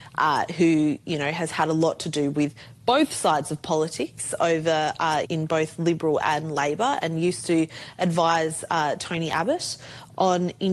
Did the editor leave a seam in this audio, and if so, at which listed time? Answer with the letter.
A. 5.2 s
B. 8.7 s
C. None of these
A